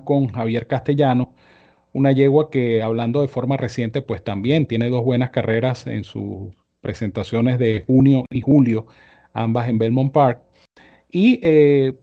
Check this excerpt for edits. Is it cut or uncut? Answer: uncut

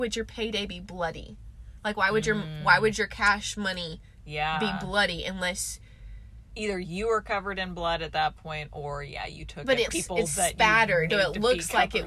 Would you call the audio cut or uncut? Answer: cut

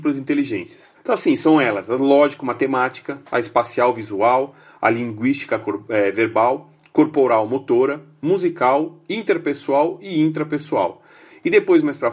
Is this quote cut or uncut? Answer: cut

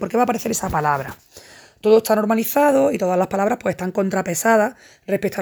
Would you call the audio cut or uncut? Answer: uncut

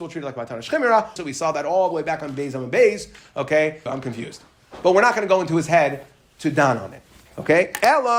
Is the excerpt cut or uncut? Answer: cut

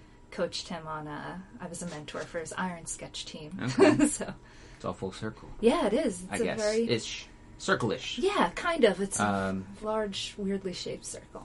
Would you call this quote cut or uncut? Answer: cut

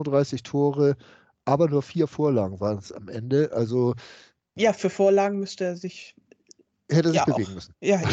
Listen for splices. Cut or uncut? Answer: uncut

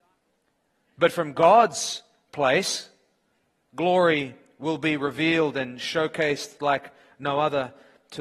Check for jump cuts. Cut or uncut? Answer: uncut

